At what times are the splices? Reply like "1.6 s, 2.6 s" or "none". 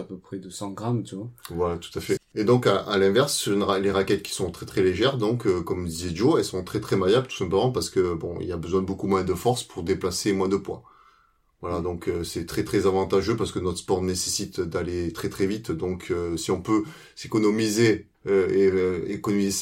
2.2 s, 18.1 s